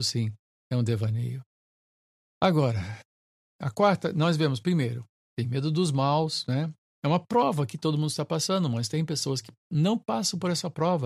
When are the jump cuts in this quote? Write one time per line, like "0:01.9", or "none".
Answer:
0:05.3
0:06.9